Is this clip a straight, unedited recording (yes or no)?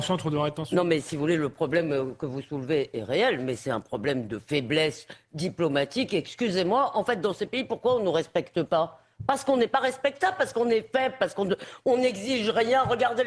yes